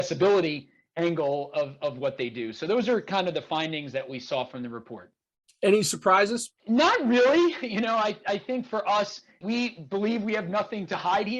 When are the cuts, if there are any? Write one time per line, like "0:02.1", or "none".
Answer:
0:06.6

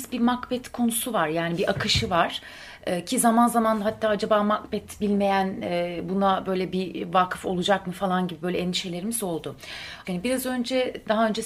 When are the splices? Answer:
0:10.0

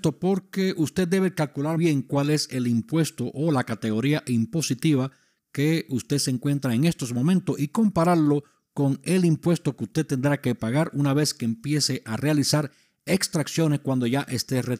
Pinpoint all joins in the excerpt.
0:01.8

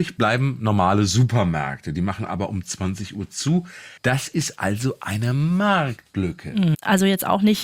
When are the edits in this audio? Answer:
0:04.0
0:06.7

